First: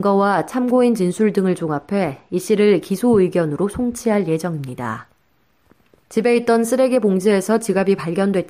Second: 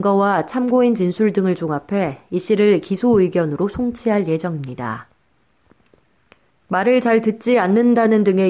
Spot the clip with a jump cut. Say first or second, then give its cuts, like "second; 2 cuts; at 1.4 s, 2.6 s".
first; 1 cut; at 6.1 s